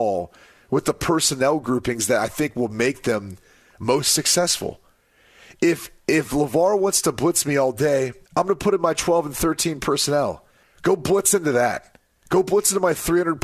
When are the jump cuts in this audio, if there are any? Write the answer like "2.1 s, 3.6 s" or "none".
8.3 s, 10.6 s